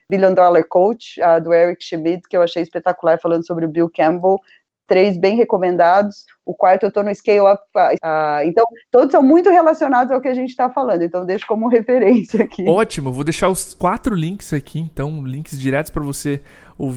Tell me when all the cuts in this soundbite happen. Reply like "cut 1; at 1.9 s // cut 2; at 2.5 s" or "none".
cut 1; at 8.0 s